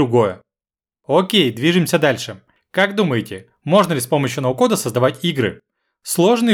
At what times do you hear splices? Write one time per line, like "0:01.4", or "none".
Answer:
none